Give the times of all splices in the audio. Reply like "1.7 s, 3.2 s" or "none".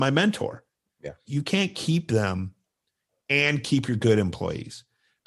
1.2 s